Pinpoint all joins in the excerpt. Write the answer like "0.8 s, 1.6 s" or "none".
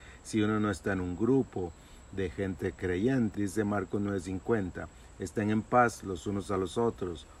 3.3 s